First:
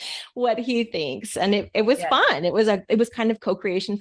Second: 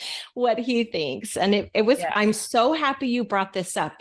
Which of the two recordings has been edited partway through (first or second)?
second